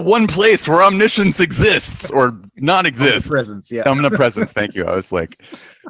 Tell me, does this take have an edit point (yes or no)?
no